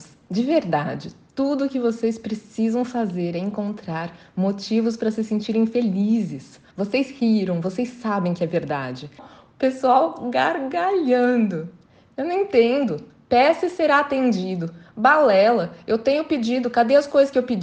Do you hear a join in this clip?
yes; 2 cuts; at 6.7 s, 9.2 s

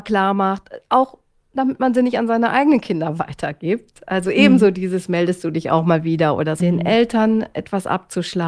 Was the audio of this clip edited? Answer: yes; 1 cut; at 6.6 s

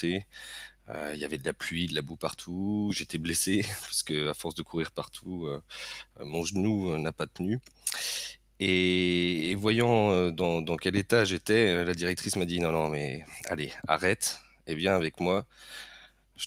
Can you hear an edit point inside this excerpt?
no; 0 cuts

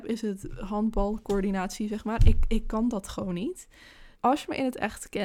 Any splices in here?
yes; 1 cut; at 4.1 s

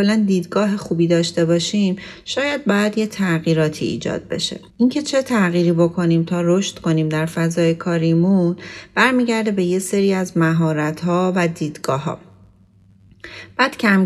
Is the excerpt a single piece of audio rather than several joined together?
no; 1 cut; at 4.7 s

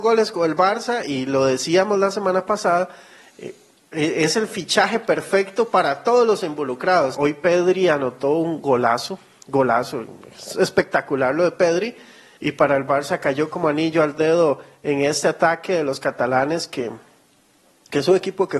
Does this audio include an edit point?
yes; 2 cuts; at 7.1 s, 12.4 s

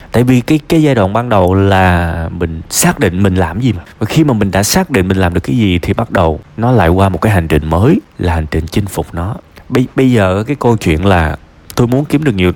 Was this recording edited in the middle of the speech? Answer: no; 0 cuts

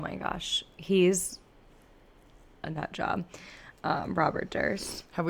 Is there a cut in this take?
no; 0 cuts

